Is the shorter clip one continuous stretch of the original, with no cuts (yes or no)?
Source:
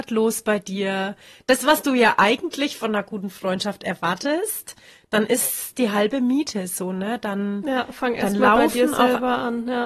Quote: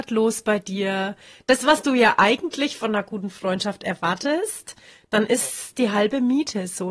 yes